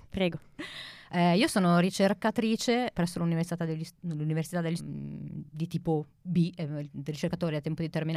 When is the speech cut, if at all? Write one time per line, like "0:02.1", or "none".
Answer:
0:02.9
0:04.8